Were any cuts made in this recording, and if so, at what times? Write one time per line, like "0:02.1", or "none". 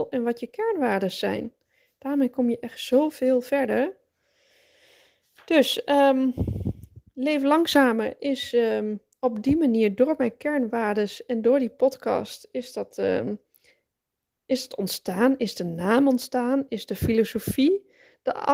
none